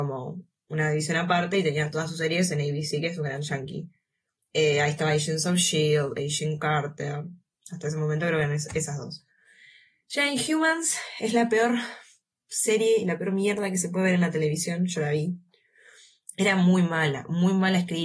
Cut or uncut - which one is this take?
uncut